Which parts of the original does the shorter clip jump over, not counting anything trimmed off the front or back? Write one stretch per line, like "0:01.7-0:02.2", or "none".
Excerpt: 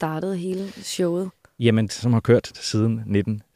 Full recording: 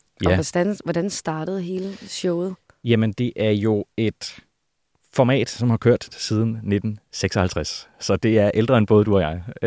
0:03.1-0:05.5